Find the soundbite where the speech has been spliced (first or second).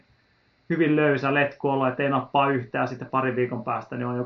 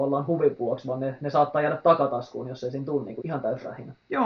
second